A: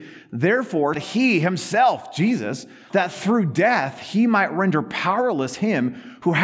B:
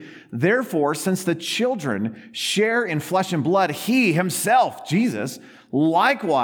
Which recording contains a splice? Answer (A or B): A